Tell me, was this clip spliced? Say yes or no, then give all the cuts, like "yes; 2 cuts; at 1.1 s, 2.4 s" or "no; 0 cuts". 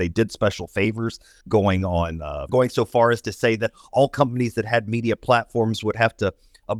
yes; 2 cuts; at 1.4 s, 2.5 s